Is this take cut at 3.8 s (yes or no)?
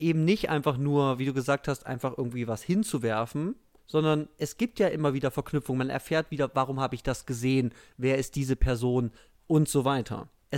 yes